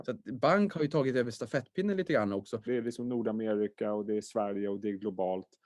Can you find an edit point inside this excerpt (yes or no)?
yes